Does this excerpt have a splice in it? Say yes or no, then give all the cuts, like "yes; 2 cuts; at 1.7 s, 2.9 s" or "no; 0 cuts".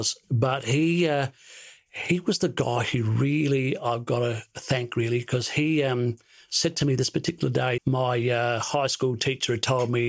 yes; 1 cut; at 7.8 s